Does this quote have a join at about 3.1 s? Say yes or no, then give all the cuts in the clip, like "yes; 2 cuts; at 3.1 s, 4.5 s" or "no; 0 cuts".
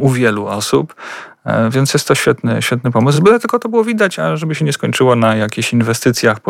no; 0 cuts